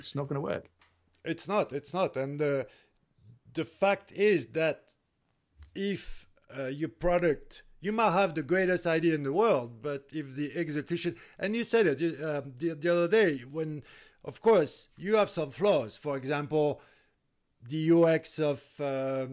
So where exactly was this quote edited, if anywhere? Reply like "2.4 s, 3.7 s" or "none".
none